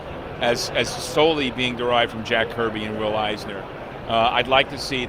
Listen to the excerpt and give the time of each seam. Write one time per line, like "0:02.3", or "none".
0:04.0